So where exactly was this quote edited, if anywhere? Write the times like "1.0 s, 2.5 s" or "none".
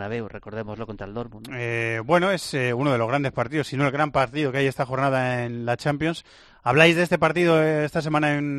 none